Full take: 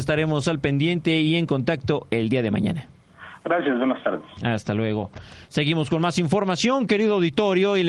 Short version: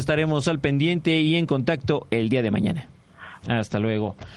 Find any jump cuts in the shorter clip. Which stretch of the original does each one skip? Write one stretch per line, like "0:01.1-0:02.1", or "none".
0:03.4-0:04.4